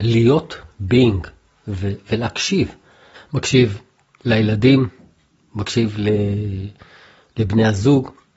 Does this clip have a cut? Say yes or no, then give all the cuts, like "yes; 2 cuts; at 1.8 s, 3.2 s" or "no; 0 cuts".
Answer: yes; 1 cut; at 3.1 s